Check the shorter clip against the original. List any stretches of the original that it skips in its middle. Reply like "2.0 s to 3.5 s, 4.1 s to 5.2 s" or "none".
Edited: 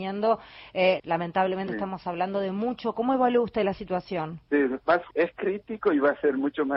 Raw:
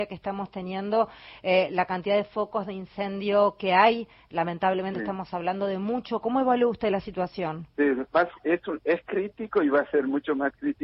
1.7 s to 4.3 s, 8.4 s to 8.8 s